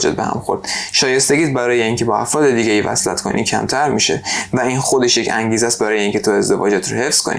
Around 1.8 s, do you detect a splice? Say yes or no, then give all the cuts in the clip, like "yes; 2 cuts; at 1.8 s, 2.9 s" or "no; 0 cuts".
no; 0 cuts